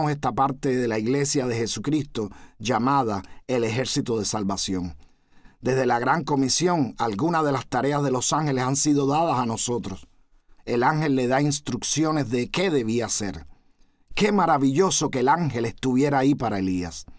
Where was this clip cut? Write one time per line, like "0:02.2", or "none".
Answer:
0:10.6